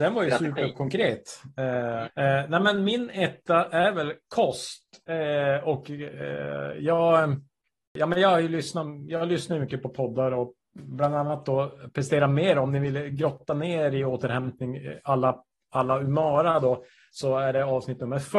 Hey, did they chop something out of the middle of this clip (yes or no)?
yes